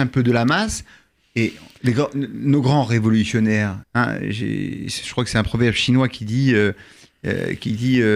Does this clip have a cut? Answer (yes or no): yes